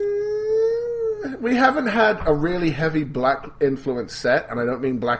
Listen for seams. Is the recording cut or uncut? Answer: uncut